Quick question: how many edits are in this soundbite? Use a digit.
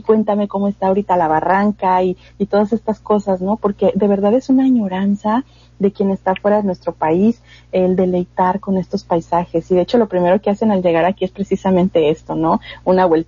0